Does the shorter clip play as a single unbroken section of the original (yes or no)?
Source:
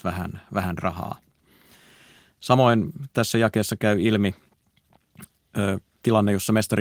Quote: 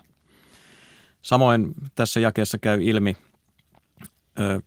yes